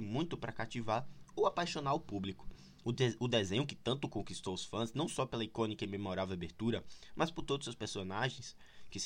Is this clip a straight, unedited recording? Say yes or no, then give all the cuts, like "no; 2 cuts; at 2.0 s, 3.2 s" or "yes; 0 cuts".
no; 1 cut; at 2.8 s